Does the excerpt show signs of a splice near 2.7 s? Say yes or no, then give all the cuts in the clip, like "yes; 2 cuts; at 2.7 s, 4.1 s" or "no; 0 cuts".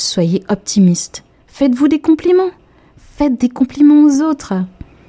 no; 0 cuts